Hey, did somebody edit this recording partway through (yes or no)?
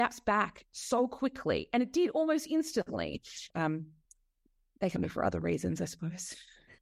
yes